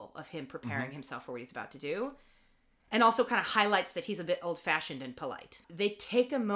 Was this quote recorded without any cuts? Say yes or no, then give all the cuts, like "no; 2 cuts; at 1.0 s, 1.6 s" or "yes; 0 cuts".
no; 1 cut; at 5.6 s